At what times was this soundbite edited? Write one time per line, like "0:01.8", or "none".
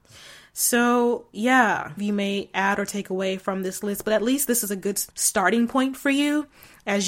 0:02.0
0:05.1